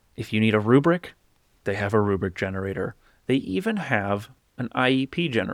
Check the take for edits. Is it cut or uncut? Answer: uncut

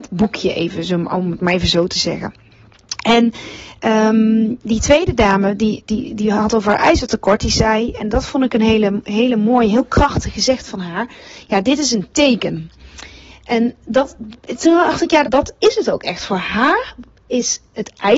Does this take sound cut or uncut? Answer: cut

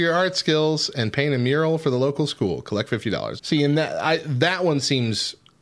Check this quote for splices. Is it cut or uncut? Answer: cut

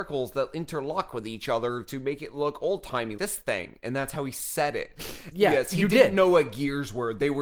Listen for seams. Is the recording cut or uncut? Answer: cut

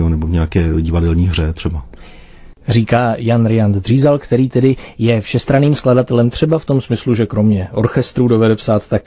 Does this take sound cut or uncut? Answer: uncut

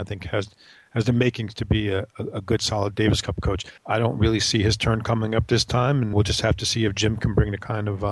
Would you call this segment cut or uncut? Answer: cut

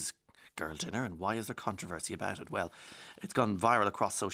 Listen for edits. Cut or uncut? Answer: uncut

